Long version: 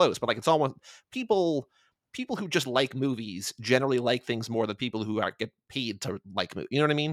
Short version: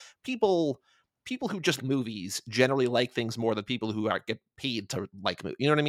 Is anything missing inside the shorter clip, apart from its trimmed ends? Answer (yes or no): yes